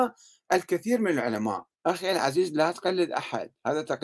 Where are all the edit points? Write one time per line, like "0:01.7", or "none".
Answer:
0:01.7